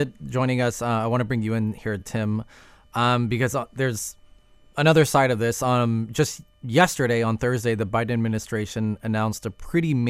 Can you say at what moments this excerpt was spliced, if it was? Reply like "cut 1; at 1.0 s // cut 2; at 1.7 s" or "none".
none